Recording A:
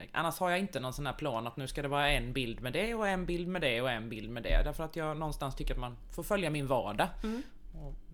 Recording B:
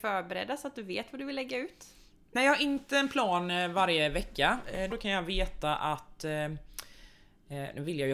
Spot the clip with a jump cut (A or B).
B